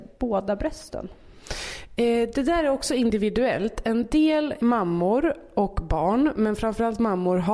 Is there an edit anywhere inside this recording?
yes; 1 cut; at 4.6 s

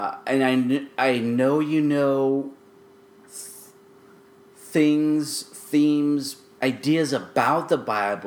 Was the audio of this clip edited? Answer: yes; 1 cut; at 6.6 s

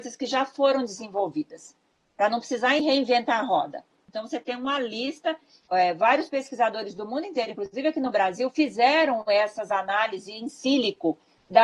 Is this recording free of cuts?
yes; 0 cuts

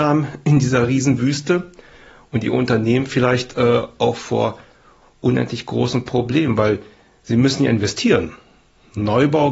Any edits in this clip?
no; 0 cuts

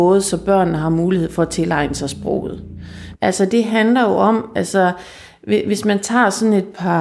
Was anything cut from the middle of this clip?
yes; 1 cut; at 3.1 s

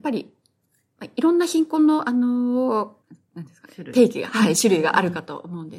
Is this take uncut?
no; 1 cut; at 3.0 s

